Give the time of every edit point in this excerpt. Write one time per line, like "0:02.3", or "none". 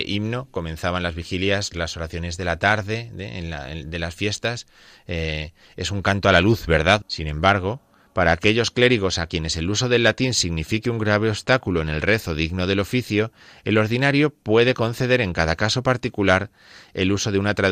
0:01.7
0:07.0